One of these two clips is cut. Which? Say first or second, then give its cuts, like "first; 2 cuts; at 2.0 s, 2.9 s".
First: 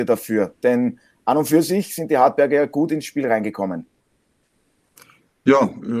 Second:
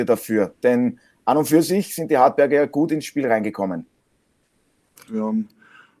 second; 1 cut; at 5.1 s